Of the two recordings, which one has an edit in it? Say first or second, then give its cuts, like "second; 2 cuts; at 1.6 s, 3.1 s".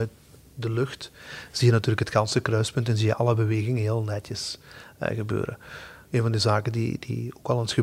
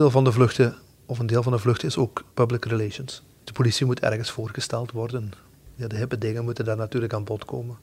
second; 1 cut; at 2.3 s